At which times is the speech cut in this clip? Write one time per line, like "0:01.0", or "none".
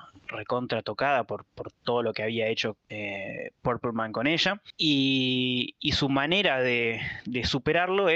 none